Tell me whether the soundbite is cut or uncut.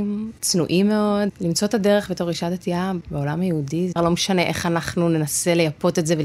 cut